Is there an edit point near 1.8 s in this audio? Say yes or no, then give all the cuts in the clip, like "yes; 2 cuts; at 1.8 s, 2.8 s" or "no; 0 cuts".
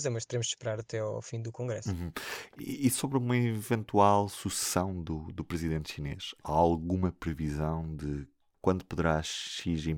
no; 0 cuts